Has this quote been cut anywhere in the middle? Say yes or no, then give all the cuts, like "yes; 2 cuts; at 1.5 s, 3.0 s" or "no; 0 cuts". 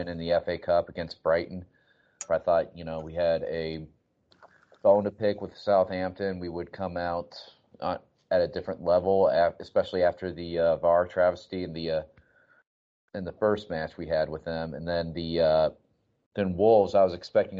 yes; 1 cut; at 2.3 s